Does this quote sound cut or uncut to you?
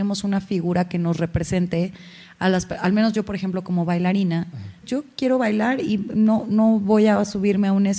cut